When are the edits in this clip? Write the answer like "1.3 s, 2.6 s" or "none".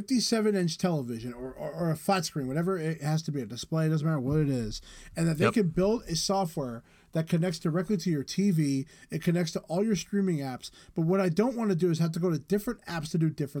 none